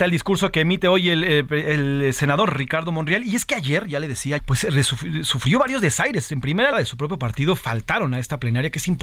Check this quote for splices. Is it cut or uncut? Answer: cut